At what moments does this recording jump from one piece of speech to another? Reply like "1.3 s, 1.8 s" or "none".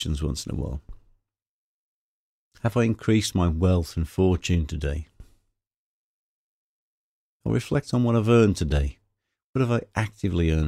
none